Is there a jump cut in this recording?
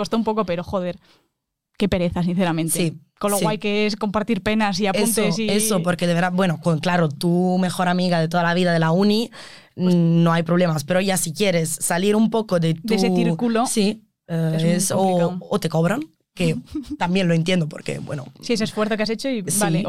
no; 0 cuts

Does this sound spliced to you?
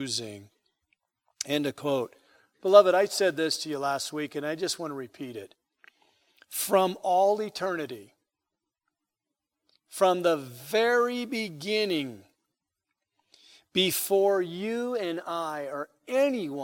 no; 0 cuts

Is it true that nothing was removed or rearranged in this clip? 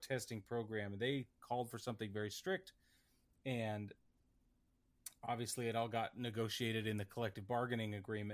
yes; 0 cuts

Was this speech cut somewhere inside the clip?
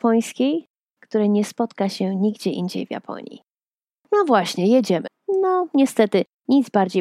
yes; 3 cuts; at 1.0 s, 4.0 s, 5.1 s

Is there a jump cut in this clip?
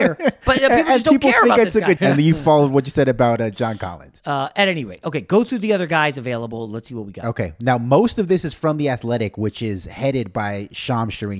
yes; 2 cuts; at 2.0 s, 4.2 s

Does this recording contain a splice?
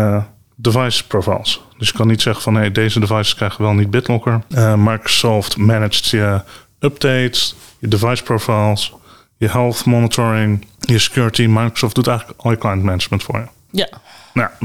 yes; 1 cut; at 4.5 s

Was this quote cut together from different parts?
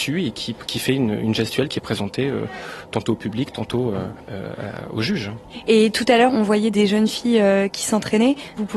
no; 0 cuts

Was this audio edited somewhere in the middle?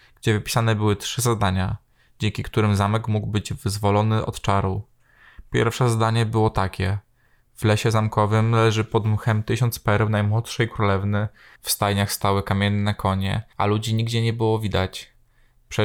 yes; 1 cut; at 11.6 s

